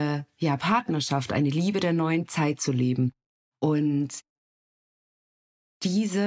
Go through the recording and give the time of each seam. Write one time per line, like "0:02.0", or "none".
none